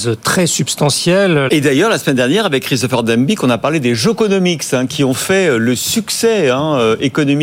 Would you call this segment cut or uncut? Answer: cut